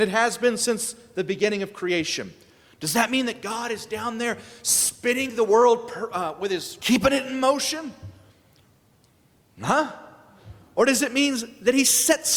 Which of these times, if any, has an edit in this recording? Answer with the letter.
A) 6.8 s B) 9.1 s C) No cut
A